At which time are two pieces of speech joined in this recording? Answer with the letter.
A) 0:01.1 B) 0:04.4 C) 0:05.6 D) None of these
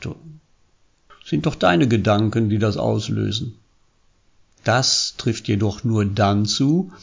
A